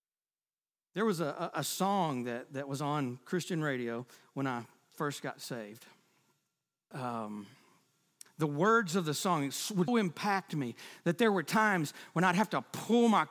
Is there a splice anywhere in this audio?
yes; 2 cuts; at 6.9 s, 9.9 s

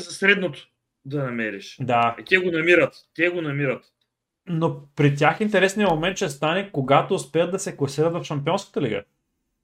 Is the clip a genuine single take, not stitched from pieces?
yes; 0 cuts

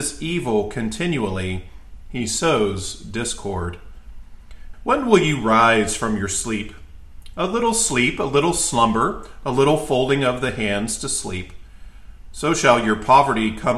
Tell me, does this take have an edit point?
yes; 1 cut; at 4.7 s

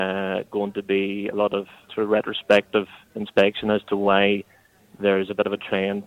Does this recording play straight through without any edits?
no; 1 cut; at 1.9 s

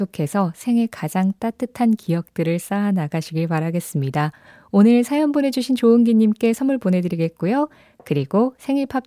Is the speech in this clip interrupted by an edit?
no; 0 cuts

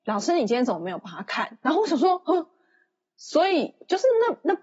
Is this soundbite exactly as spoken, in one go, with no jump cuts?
yes; 0 cuts

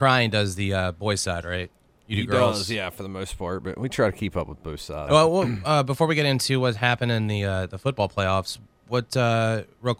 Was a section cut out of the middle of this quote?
yes; 1 cut; at 5.1 s

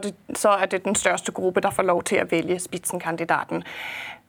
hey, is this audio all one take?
yes; 0 cuts

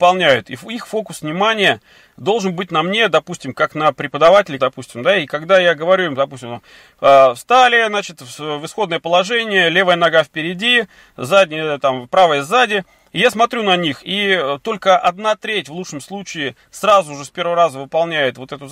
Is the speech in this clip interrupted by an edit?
yes; 1 cut; at 4.6 s

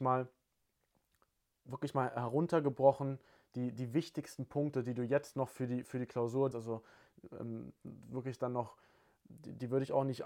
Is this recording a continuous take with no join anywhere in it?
no; 1 cut; at 6.5 s

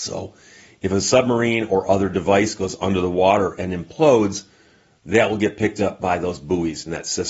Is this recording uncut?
yes; 0 cuts

